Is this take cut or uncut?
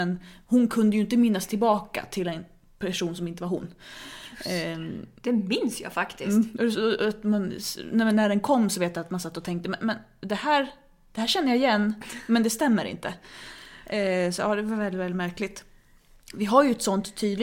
uncut